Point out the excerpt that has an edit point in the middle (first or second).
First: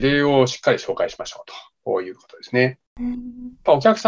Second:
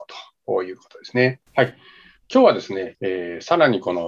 second